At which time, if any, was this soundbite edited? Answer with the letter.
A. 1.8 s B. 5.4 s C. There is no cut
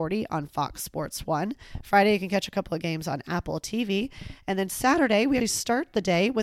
B